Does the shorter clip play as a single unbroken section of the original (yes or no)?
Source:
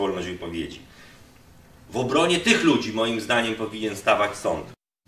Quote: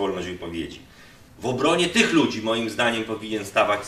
no